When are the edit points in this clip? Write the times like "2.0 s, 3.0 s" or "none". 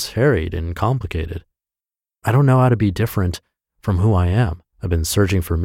4.7 s